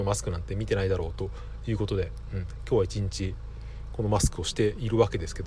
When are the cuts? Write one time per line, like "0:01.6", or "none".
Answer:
none